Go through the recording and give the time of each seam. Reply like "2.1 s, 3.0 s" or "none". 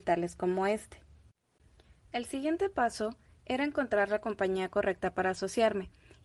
none